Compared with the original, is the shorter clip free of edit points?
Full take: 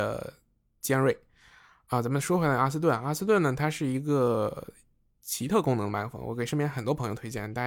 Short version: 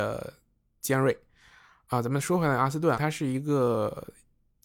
no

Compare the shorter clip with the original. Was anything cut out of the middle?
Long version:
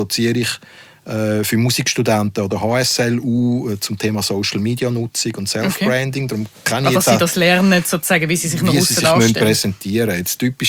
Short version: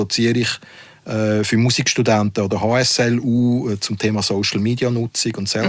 no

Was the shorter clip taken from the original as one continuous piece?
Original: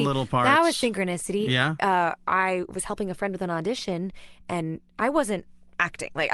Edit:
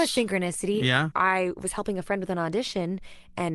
no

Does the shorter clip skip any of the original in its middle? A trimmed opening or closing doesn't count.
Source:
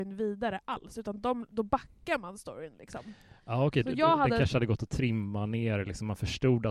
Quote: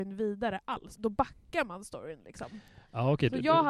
yes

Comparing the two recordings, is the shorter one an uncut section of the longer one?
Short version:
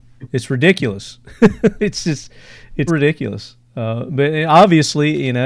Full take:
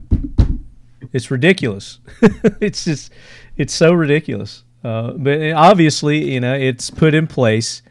no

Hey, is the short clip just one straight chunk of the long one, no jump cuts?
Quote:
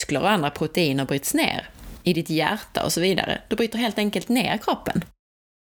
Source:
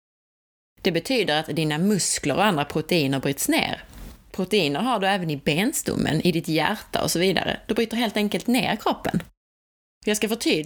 no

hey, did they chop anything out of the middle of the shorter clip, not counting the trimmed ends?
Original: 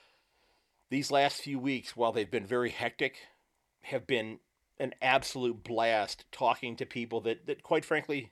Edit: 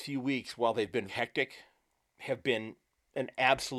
yes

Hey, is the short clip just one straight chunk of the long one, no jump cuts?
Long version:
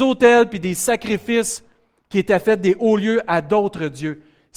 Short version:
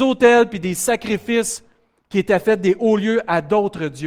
yes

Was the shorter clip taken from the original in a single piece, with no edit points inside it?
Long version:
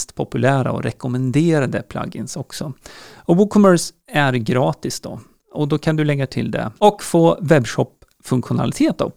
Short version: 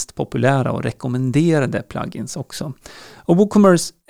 yes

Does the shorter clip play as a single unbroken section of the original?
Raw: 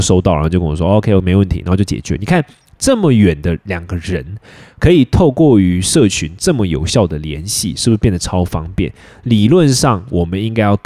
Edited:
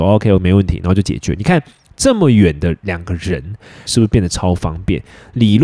no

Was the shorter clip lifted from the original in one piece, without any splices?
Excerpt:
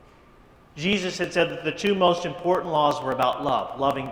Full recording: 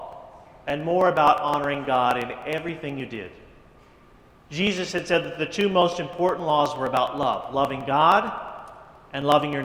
yes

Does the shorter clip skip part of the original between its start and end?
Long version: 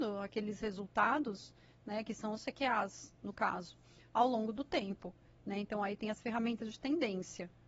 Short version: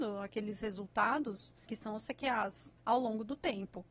yes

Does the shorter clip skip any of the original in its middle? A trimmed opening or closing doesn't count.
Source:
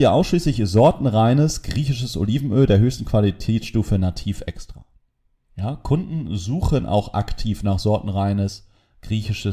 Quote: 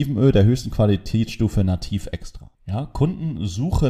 yes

